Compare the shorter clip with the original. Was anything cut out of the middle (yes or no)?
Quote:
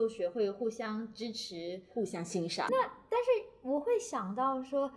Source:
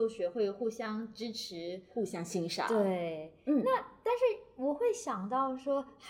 yes